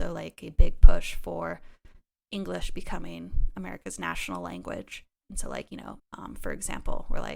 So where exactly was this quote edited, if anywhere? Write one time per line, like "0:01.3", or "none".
0:06.0